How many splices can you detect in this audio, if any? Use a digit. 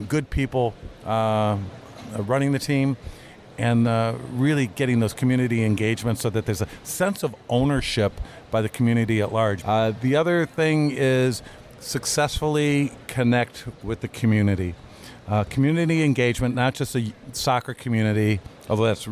2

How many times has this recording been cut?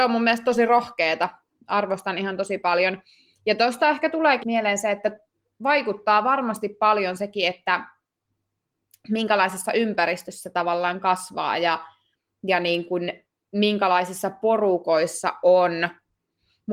1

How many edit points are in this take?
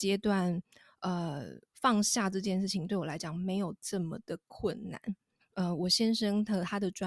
1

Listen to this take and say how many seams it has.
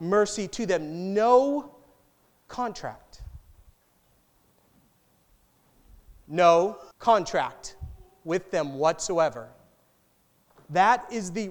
1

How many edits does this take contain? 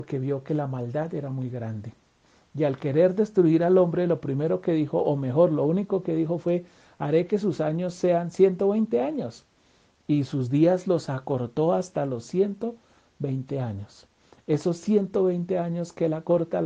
0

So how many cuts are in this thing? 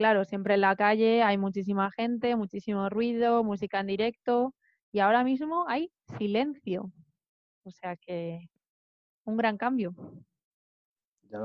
0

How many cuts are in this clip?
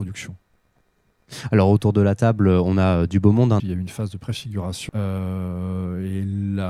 2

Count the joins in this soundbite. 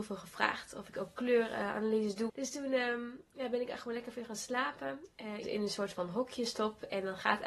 2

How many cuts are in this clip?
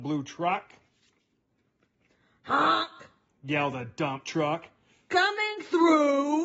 0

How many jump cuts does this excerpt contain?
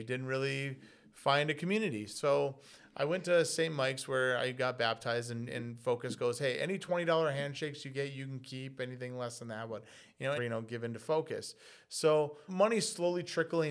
2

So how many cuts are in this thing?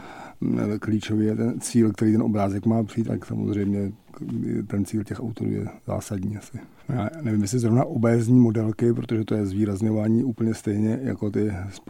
2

